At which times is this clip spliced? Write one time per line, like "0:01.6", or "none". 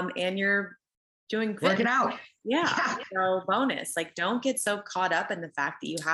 none